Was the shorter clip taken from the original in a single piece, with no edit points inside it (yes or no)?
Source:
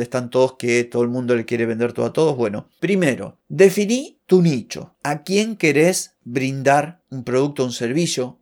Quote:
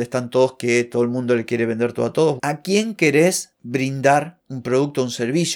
no